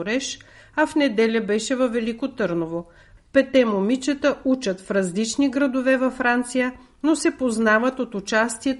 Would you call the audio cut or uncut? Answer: cut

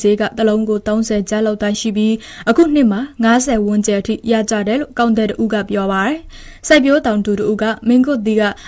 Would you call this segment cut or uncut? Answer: cut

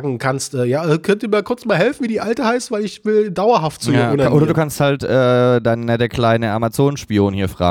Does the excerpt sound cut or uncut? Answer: uncut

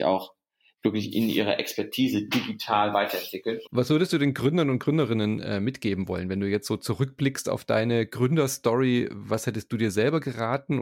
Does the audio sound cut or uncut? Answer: cut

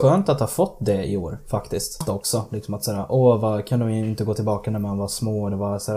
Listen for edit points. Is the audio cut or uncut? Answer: cut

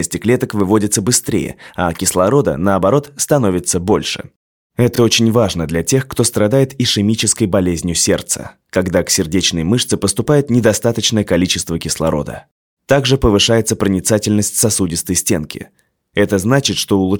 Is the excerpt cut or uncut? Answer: uncut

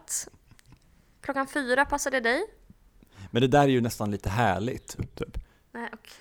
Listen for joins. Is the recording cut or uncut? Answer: cut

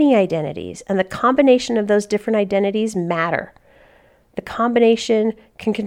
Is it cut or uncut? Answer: uncut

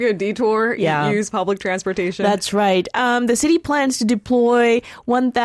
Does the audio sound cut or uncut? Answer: uncut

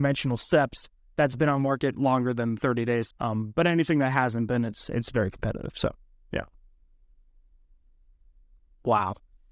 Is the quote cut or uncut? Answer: cut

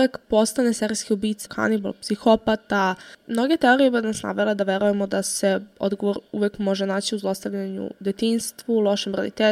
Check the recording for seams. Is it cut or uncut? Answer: cut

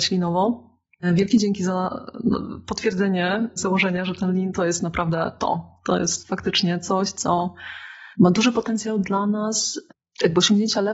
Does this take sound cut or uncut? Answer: cut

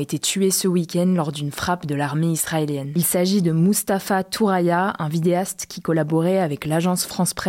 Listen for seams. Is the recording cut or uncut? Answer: uncut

